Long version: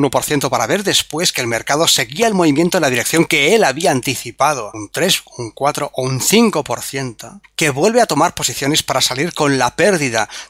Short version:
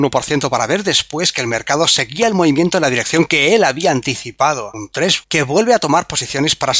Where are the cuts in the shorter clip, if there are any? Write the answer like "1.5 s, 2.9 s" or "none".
5.2 s